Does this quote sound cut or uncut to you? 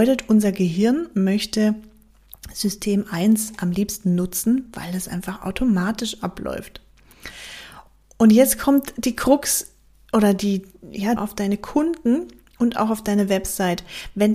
cut